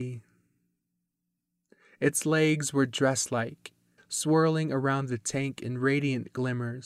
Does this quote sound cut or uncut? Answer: cut